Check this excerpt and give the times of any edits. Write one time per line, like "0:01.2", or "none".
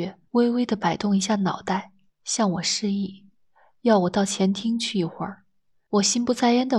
0:05.9